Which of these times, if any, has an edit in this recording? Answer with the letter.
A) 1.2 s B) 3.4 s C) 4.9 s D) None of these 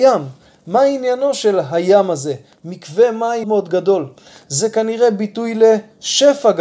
B